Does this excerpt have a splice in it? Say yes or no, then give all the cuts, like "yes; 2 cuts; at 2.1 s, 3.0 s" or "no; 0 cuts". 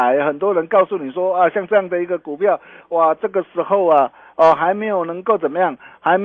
no; 0 cuts